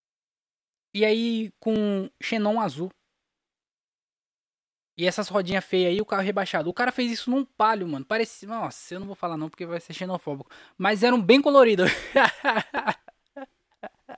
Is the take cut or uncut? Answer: uncut